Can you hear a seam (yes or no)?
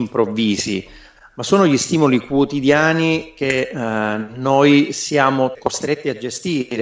yes